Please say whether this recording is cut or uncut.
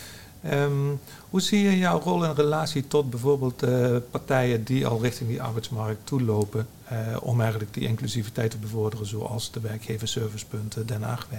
uncut